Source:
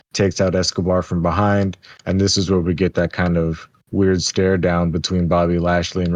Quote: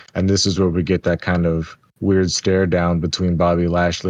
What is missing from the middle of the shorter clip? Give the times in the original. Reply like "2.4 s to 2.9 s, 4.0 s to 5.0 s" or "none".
none